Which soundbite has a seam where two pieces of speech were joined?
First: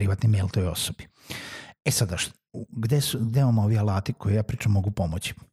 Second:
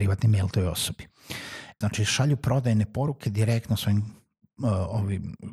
second; 1 cut; at 1.8 s

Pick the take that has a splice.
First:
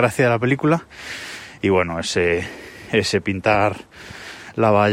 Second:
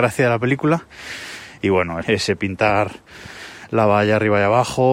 second; 1 cut; at 2.0 s

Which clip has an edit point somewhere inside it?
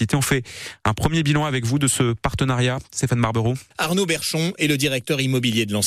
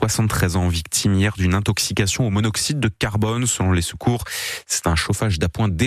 first; 1 cut; at 3.7 s

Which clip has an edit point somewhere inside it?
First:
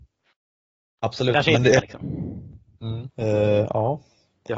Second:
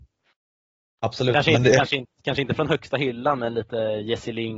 first; 2 cuts; at 1.8 s, 3.1 s

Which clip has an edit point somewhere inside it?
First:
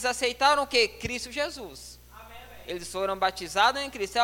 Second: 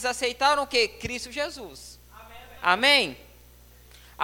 second; 1 cut; at 2.6 s

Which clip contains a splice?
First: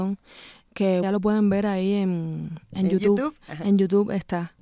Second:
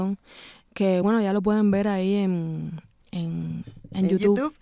first; 2 cuts; at 1.0 s, 2.7 s

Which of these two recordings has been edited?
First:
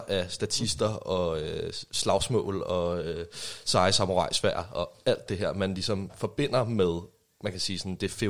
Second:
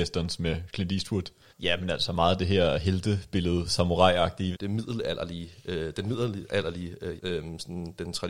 second; 3 cuts; at 1.5 s, 4.5 s, 7.2 s

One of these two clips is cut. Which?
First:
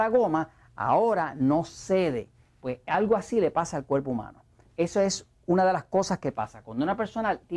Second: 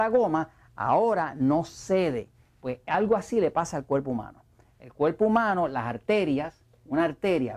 first; 1 cut; at 4.7 s

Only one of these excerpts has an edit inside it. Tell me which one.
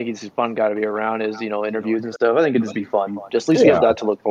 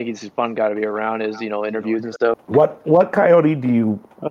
second; 1 cut; at 2.3 s

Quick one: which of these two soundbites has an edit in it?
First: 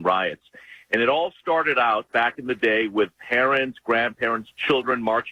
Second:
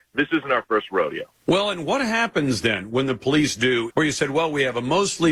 second; 2 cuts; at 1.3 s, 3.9 s

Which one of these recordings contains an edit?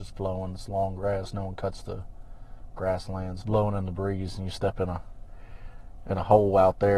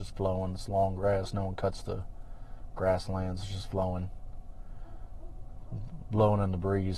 first; 1 cut; at 3.4 s

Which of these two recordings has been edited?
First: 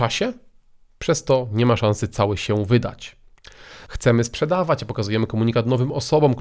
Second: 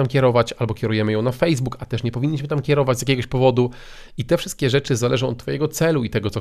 first; 1 cut; at 3.9 s

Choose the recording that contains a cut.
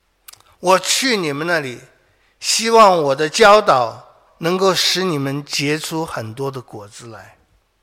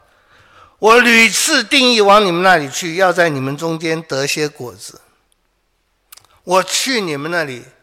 first; 1 cut; at 4.3 s

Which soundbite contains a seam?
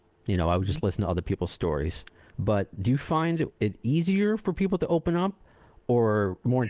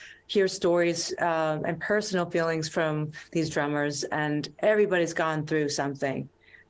first; 2 cuts; at 2.3 s, 3.5 s

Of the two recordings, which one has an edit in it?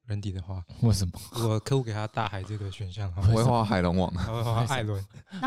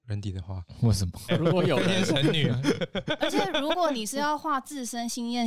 second; 1 cut; at 1.3 s

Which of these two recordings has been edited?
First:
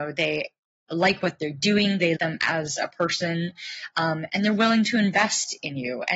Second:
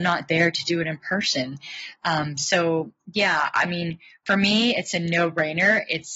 first; 1 cut; at 2.2 s

